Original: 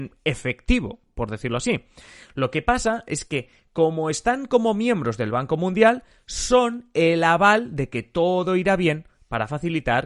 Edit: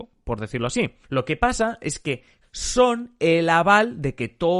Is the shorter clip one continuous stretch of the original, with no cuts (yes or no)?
no